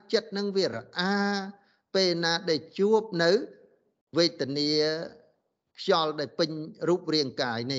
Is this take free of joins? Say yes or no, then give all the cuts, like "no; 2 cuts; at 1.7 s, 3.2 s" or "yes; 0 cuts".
yes; 0 cuts